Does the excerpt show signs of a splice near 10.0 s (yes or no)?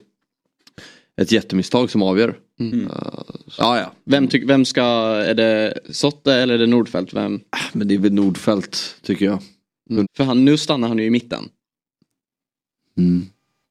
yes